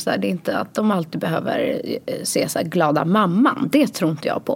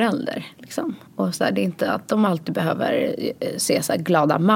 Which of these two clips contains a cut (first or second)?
second